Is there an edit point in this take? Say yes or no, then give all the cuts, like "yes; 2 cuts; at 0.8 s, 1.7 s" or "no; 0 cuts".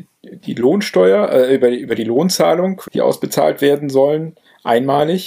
yes; 1 cut; at 2.9 s